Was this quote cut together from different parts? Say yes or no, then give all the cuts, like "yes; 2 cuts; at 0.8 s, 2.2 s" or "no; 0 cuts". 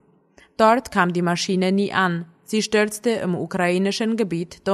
no; 0 cuts